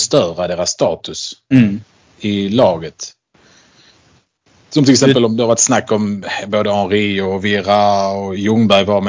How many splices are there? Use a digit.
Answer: 1